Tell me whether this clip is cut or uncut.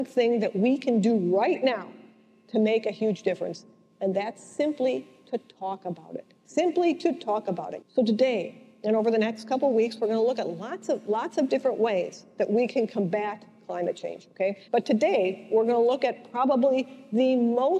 cut